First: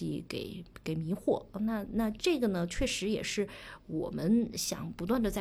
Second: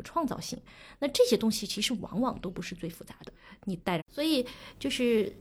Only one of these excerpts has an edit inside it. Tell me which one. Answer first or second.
second